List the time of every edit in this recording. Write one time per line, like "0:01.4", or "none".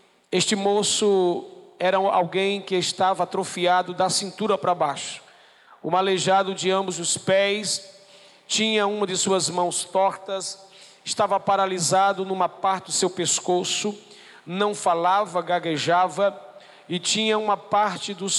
none